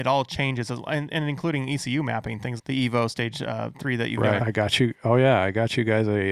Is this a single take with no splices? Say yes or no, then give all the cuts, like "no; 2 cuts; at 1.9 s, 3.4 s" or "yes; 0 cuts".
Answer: no; 2 cuts; at 2.6 s, 4.4 s